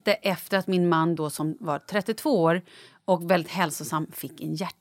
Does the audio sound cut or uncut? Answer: uncut